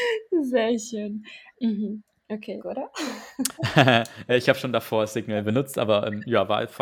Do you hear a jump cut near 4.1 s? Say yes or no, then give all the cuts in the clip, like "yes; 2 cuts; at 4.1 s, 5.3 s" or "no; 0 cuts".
no; 2 cuts; at 1.5 s, 2.6 s